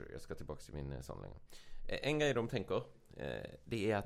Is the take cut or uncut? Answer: uncut